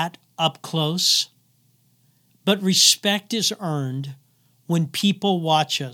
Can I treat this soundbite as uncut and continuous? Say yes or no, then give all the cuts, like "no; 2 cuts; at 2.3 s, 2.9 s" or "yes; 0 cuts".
no; 1 cut; at 2.3 s